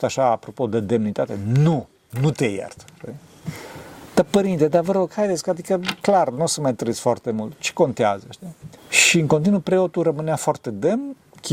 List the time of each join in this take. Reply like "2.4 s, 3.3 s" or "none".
8.8 s